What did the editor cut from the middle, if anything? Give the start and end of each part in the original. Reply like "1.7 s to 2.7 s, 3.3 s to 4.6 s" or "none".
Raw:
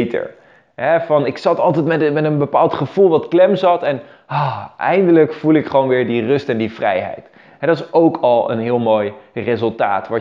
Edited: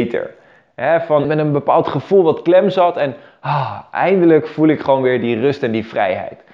1.2 s to 2.1 s